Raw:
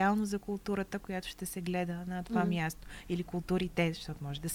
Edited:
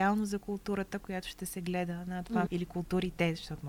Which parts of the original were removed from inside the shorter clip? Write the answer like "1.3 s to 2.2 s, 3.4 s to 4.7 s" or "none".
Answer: 2.5 s to 3.0 s